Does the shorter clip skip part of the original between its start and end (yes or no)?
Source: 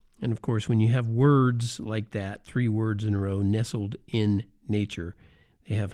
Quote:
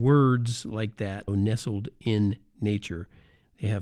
yes